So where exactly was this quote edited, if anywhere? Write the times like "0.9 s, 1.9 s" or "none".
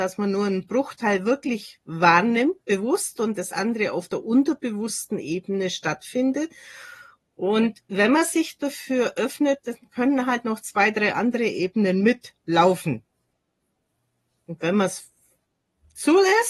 none